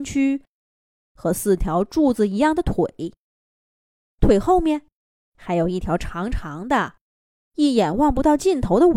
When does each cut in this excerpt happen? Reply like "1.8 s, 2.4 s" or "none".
none